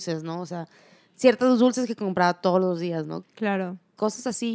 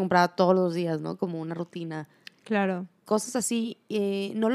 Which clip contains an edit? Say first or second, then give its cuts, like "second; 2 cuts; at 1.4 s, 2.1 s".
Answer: first; 1 cut; at 3.2 s